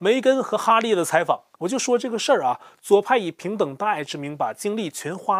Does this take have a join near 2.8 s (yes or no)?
no